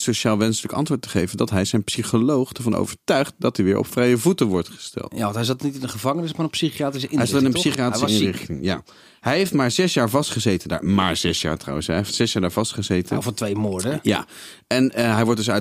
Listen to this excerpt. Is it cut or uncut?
uncut